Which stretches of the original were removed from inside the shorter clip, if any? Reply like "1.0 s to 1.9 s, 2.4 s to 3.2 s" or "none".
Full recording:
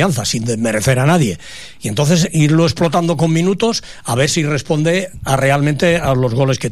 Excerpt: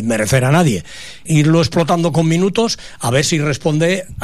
1.8 s to 2.3 s